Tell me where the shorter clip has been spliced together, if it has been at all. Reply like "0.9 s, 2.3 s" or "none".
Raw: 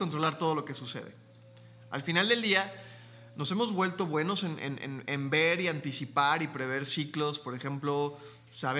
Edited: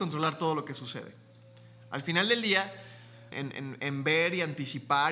3.3 s